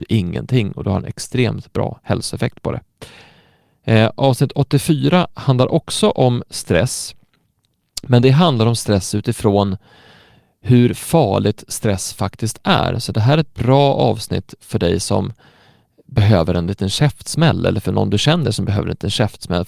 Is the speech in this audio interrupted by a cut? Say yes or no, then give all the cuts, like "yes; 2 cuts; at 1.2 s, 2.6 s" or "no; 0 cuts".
no; 0 cuts